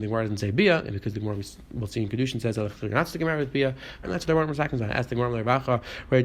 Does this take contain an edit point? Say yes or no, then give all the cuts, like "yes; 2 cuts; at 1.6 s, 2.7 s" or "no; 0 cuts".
yes; 1 cut; at 4.0 s